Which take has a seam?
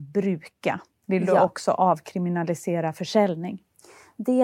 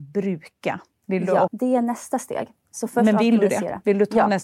second; 1 cut; at 1.5 s

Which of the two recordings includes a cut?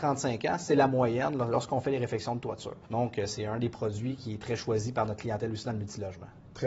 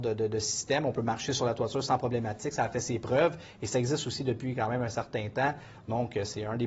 first; 1 cut; at 2.8 s

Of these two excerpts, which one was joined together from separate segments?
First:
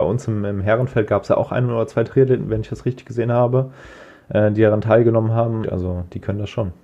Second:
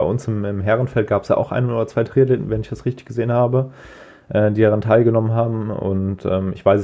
first; 1 cut; at 5.6 s

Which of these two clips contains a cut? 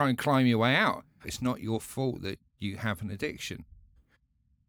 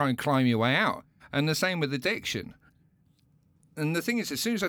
first; 2 cuts; at 1.2 s, 2.5 s

